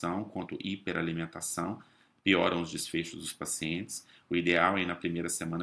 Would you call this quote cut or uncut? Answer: uncut